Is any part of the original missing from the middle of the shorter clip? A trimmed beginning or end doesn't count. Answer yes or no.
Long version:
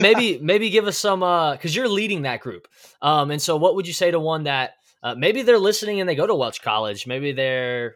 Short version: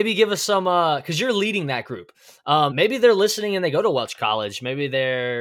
yes